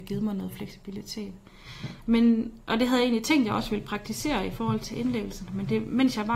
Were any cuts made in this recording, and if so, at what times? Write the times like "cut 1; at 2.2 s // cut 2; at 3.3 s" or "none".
none